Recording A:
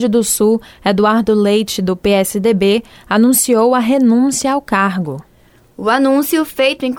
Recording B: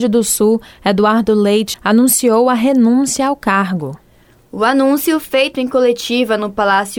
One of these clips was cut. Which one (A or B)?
B